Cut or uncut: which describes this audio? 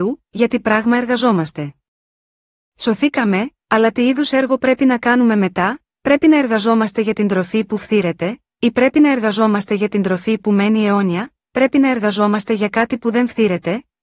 uncut